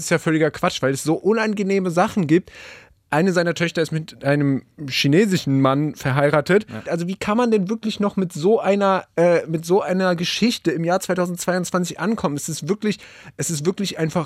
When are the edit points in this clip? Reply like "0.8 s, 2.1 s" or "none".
6.9 s